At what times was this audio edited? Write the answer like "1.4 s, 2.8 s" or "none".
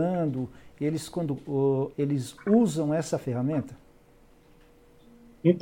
1.9 s